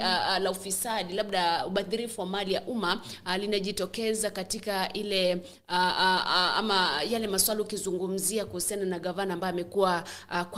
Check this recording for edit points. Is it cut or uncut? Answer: uncut